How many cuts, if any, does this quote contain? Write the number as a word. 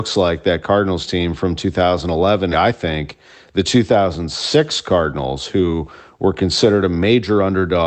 one